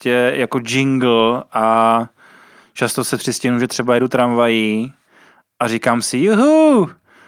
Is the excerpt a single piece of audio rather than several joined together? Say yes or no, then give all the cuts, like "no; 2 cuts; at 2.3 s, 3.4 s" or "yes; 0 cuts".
yes; 0 cuts